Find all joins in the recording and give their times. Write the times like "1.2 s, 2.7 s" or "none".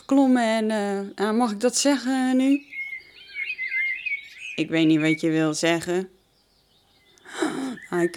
1.2 s